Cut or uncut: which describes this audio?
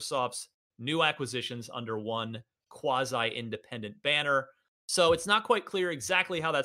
cut